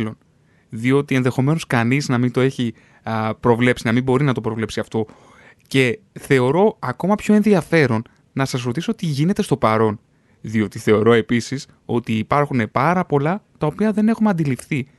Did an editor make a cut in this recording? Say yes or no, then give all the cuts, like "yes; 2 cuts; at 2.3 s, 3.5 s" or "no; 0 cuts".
no; 0 cuts